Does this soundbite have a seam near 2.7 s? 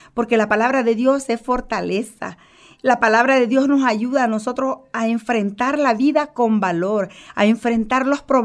no; 0 cuts

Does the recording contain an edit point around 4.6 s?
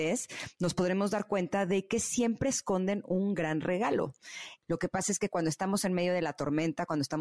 yes; 1 cut; at 4.6 s

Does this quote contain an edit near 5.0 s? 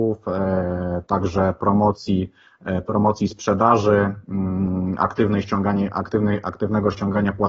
no; 0 cuts

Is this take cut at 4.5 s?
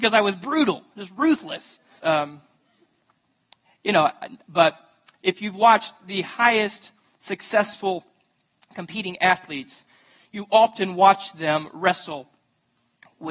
yes; 2 cuts; at 2.0 s, 4.5 s

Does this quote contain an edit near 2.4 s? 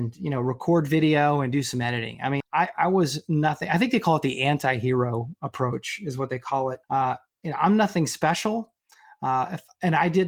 yes; 2 cuts; at 2.4 s, 6.8 s

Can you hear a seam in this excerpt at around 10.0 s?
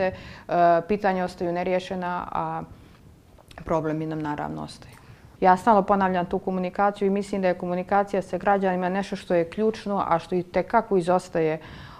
no; 1 cut; at 5.4 s

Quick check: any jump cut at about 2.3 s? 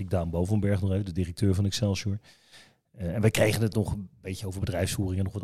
no; 0 cuts

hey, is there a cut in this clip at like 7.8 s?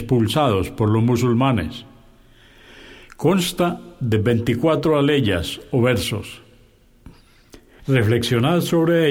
yes; 1 cut; at 7.8 s

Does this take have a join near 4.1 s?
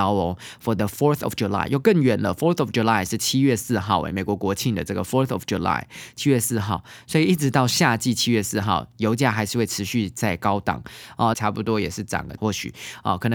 no; 2 cuts; at 11.3 s, 12.4 s

